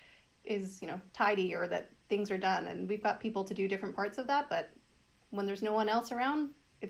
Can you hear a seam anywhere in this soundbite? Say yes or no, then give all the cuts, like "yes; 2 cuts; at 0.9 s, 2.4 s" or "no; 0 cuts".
no; 0 cuts